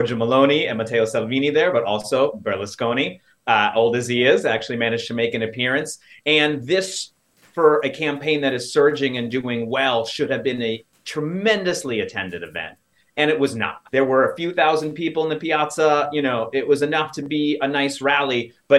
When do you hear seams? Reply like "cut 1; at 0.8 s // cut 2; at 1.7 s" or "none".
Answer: cut 1; at 13.9 s